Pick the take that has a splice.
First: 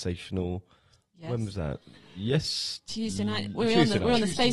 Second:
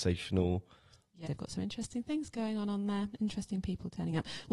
second; 1 cut; at 1.2 s

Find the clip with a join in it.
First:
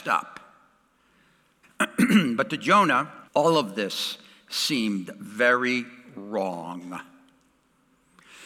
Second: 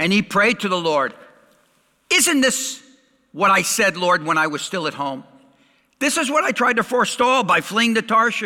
first; 2 cuts; at 1.6 s, 3.3 s

